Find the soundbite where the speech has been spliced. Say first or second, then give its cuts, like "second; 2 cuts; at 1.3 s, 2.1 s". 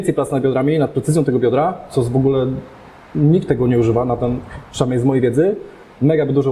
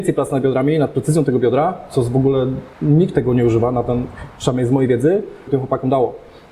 second; 2 cuts; at 2.7 s, 5.5 s